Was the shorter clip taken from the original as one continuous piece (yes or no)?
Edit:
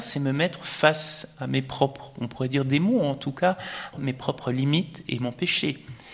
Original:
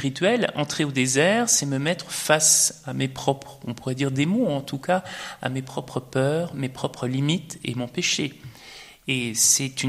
no